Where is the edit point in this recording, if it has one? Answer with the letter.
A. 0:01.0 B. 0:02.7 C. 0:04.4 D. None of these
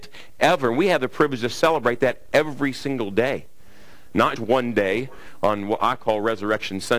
C